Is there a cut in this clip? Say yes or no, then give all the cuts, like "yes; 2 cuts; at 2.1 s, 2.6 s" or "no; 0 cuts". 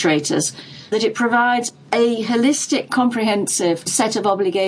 yes; 1 cut; at 0.9 s